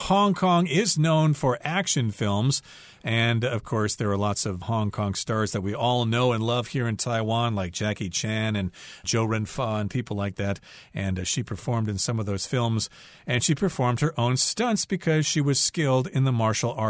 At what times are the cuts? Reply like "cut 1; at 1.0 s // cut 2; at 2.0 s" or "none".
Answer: none